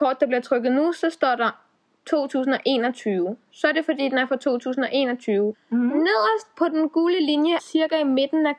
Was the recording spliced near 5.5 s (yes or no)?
yes